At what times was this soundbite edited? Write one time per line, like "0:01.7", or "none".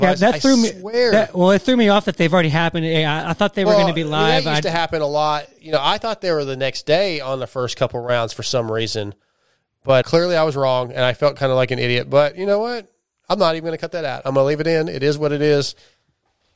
0:10.0

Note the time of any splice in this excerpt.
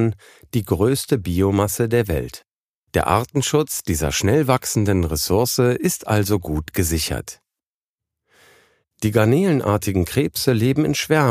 0:02.9

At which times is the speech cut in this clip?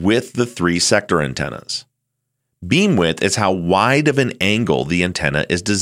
none

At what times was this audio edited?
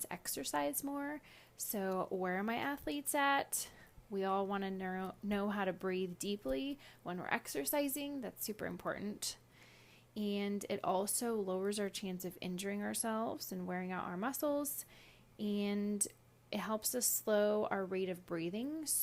none

